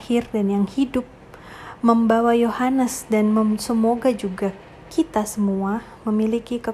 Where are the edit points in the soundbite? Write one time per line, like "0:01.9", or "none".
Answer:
none